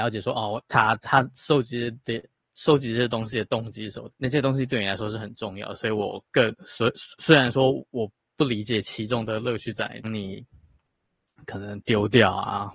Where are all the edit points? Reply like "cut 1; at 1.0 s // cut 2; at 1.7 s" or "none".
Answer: cut 1; at 4.1 s // cut 2; at 10.0 s